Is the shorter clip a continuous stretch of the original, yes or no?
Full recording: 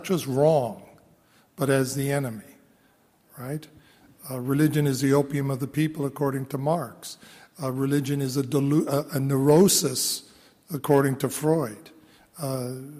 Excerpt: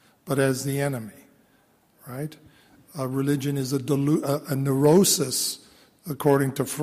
no